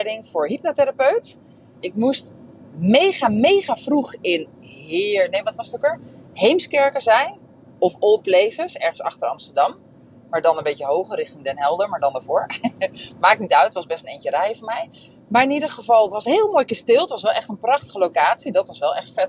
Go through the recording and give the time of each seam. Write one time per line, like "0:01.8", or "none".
0:01.7

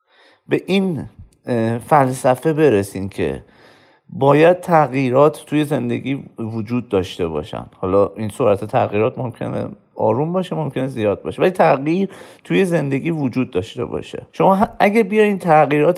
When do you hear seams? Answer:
0:14.3

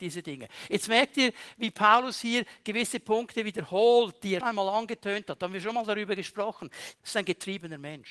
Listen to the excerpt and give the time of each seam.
0:04.4
0:06.9

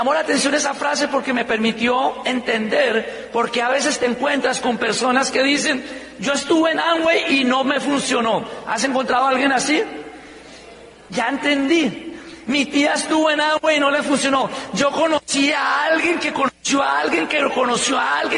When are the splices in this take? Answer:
0:11.1
0:12.4

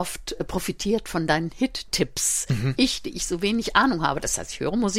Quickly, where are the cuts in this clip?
none

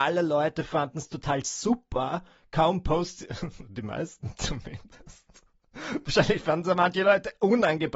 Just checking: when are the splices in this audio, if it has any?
none

